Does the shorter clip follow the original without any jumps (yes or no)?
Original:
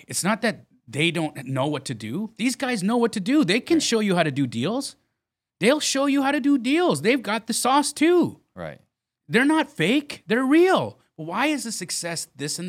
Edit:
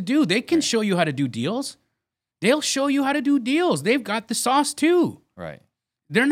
yes